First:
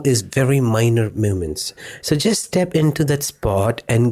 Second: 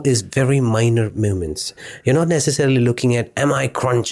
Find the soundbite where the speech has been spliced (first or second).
first